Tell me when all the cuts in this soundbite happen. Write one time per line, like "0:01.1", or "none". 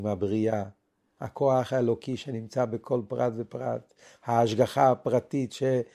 none